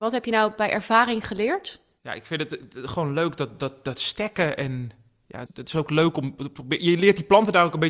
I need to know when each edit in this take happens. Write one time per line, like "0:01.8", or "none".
0:05.5